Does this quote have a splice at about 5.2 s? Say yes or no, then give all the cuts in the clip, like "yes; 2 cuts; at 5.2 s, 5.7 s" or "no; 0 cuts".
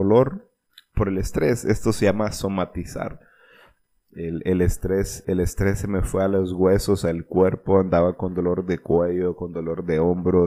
yes; 1 cut; at 5.2 s